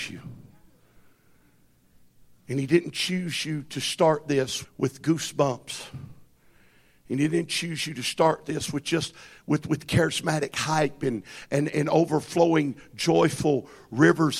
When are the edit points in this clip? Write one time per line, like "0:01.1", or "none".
0:04.6